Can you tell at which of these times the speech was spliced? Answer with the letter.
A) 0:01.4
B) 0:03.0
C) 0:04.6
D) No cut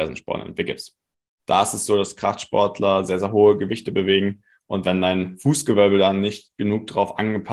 A